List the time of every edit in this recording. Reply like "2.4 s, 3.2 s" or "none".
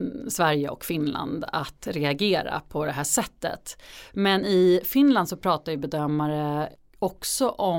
none